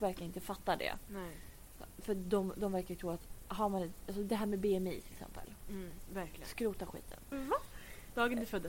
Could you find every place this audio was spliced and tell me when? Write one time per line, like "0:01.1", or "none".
0:06.1
0:07.3

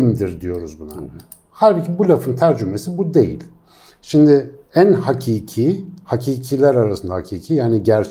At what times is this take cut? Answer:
none

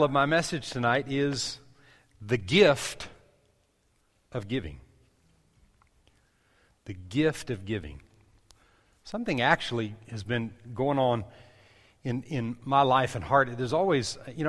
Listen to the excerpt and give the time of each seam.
none

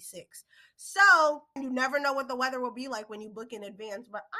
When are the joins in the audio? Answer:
0:01.6

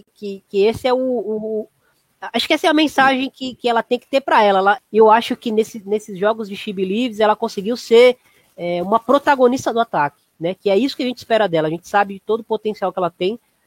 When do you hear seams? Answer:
0:04.8

